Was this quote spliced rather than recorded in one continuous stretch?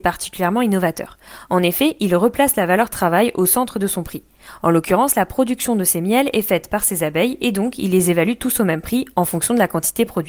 no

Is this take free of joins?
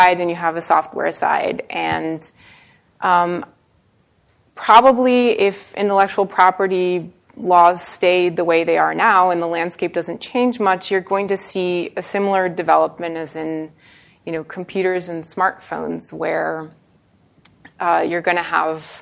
yes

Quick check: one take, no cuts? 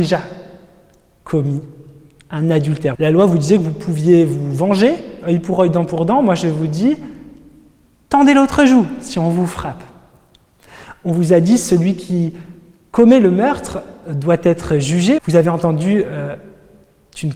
no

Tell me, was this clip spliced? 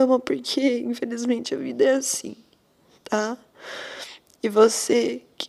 no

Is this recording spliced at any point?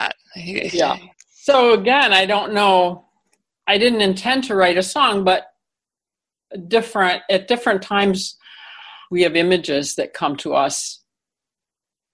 yes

